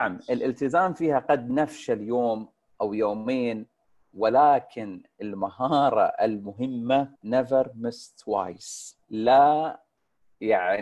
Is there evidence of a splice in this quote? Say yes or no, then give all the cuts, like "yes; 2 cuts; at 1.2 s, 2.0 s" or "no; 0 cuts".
yes; 2 cuts; at 7.2 s, 9.0 s